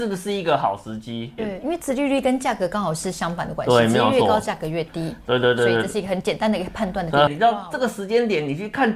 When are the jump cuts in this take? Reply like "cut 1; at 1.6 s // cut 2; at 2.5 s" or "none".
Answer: cut 1; at 1.4 s // cut 2; at 7.3 s